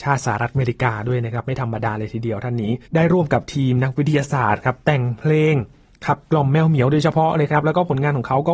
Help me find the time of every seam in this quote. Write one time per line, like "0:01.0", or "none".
0:02.9